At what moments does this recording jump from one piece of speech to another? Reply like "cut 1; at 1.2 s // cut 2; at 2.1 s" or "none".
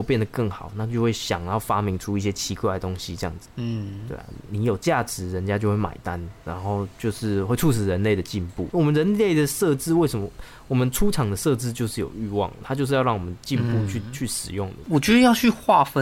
cut 1; at 8.7 s // cut 2; at 14.8 s